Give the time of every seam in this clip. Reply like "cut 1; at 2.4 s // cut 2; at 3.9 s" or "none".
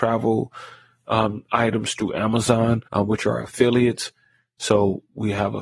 cut 1; at 2.9 s